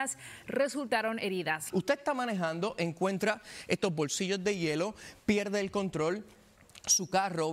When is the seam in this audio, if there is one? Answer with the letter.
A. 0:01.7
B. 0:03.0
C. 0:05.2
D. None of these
A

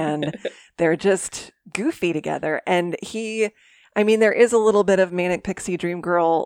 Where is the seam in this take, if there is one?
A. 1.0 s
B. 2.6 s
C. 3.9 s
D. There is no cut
D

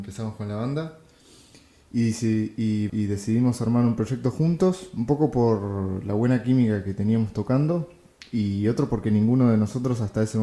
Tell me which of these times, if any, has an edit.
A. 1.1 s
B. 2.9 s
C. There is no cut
B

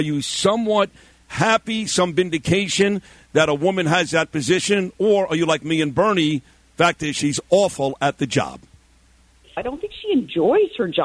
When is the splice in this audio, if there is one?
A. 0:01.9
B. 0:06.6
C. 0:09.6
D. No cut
C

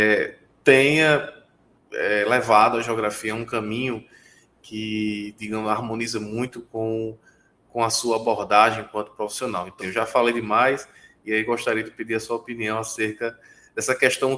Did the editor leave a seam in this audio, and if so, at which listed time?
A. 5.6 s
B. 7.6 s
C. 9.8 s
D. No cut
C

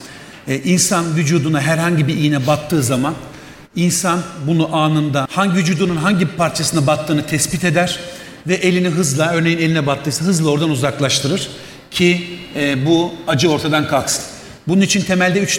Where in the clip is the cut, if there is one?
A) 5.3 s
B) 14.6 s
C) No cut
A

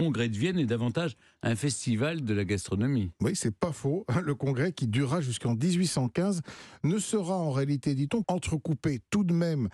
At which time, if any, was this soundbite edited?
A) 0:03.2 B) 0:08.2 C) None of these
B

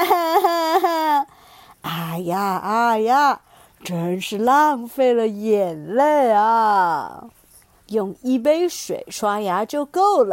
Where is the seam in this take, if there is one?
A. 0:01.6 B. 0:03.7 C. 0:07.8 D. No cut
C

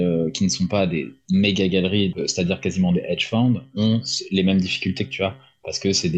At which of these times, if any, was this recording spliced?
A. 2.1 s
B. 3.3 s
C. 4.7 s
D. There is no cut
A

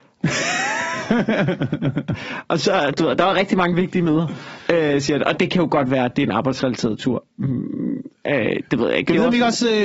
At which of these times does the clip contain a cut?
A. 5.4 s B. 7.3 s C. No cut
A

